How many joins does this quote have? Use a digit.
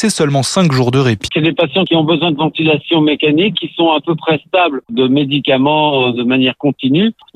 2